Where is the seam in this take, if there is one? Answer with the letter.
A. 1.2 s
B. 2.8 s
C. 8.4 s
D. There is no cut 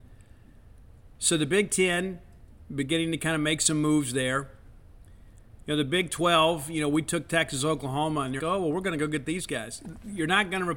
C